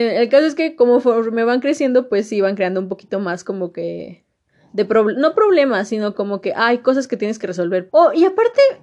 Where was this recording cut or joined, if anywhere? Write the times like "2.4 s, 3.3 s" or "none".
7.9 s